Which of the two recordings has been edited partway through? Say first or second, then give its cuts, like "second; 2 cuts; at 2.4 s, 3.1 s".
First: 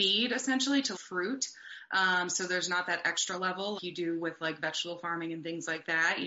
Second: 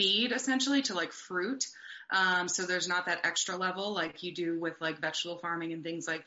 first; 2 cuts; at 0.9 s, 3.8 s